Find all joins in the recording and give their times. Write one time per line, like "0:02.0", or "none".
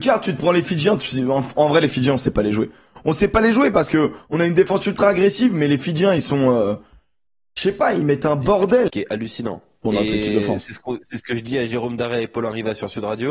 0:08.9